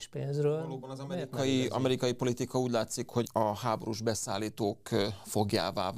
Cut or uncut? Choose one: cut